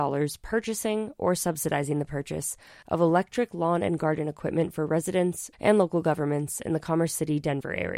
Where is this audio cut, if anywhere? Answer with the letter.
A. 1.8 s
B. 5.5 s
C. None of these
B